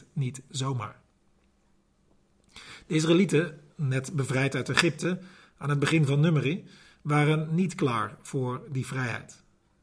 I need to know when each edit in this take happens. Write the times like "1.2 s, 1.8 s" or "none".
none